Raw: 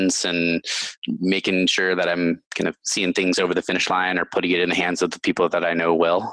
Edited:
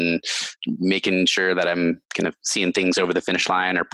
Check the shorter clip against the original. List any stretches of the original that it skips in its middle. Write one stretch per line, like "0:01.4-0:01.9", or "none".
none